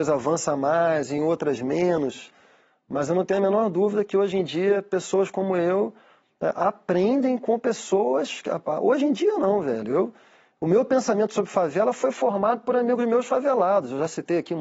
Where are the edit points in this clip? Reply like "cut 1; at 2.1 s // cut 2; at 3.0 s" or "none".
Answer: none